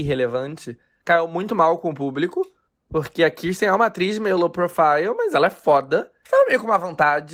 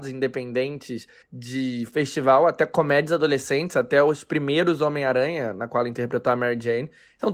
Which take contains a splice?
first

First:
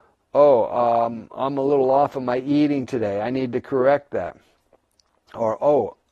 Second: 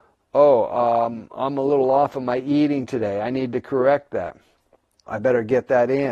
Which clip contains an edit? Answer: second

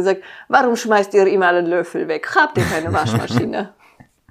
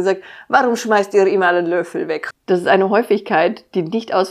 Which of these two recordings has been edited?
second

